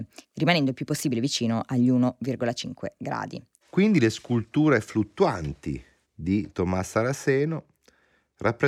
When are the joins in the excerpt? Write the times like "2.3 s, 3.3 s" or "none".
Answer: 3.6 s, 6.0 s